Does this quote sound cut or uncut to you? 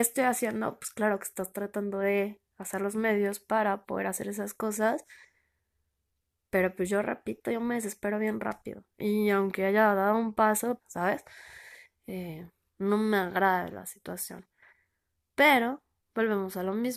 cut